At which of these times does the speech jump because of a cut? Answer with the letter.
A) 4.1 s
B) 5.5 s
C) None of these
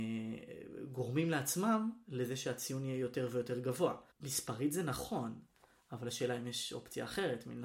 A